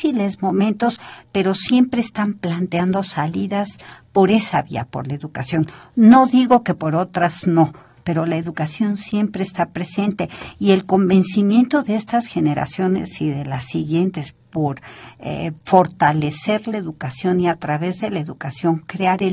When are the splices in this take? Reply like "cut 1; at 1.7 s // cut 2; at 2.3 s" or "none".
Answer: none